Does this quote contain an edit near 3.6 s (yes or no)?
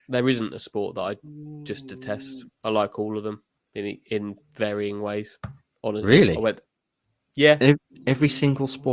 no